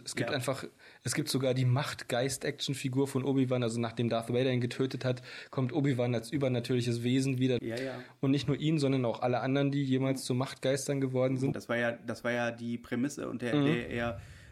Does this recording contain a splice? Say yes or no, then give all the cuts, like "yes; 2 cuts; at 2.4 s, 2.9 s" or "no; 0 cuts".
yes; 2 cuts; at 7.6 s, 11.5 s